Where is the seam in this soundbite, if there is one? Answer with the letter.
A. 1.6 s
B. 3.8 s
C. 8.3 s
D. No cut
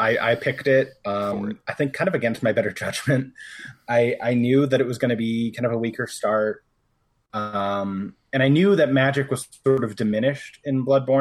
C